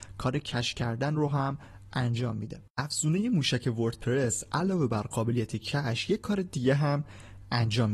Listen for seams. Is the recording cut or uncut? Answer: cut